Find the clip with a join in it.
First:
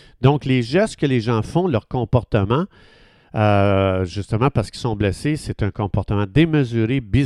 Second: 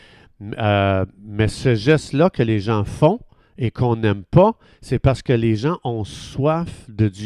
second; 1 cut; at 1.2 s

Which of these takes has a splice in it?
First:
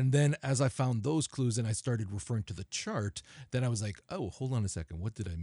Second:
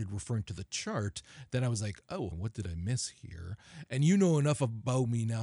second; 2 cuts; at 2.3 s, 3.9 s

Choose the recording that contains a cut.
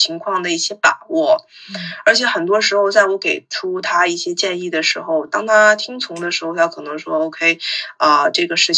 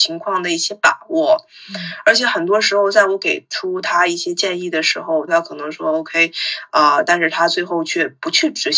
second; 2 cuts; at 5.3 s, 7.1 s

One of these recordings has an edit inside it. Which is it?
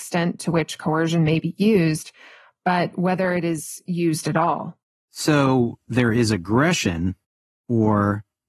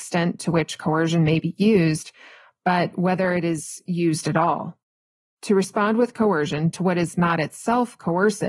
first; 1 cut; at 4.9 s

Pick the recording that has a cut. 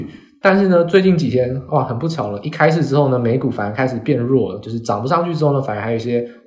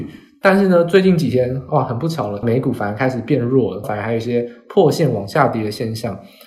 second; 2 cuts; at 2.4 s, 3.8 s

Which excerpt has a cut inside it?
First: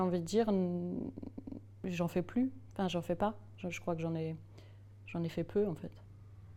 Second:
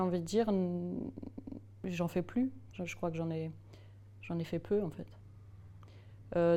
second; 1 cut; at 2.7 s

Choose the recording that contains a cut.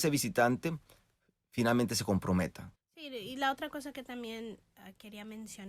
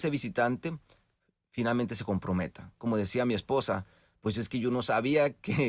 first; 1 cut; at 2.8 s

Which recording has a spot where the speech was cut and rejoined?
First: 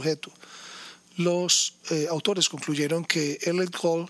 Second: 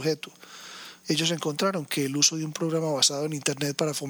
second; 1 cut; at 1.0 s

